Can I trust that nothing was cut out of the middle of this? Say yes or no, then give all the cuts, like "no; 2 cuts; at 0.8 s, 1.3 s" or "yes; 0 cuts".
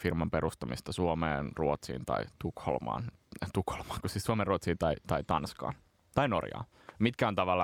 yes; 0 cuts